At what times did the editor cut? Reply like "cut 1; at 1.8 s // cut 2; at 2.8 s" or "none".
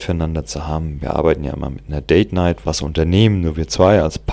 cut 1; at 2.6 s